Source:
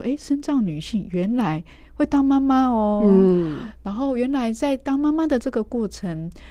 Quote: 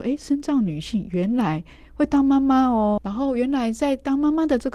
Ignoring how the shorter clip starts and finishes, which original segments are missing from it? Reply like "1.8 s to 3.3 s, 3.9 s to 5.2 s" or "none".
3.0 s to 3.8 s